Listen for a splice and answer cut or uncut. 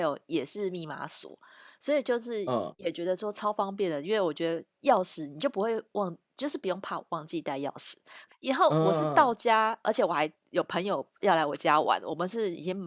cut